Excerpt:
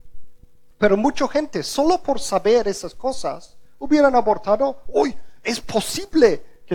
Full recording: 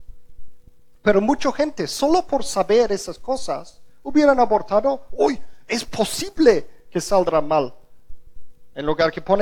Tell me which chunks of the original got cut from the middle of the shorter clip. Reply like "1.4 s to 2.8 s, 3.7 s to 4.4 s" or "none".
none